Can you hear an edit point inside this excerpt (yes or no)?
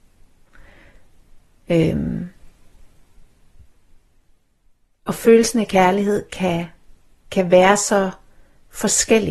no